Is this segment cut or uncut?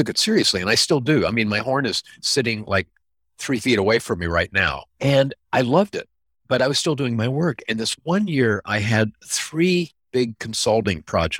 cut